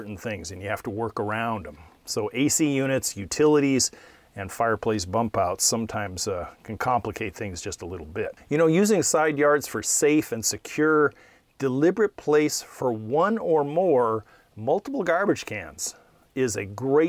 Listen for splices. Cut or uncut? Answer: uncut